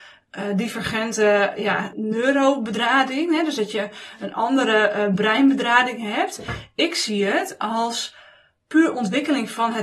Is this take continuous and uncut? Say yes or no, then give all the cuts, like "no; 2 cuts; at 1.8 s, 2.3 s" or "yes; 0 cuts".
no; 1 cut; at 1.9 s